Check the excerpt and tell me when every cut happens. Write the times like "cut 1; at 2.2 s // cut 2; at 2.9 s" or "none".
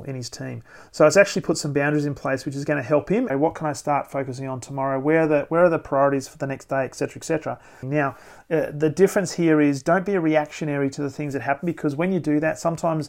cut 1; at 3.3 s // cut 2; at 7.8 s